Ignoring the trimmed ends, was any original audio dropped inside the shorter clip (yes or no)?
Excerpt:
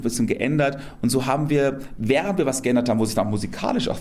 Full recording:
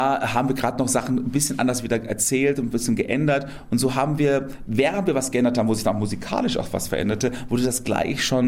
no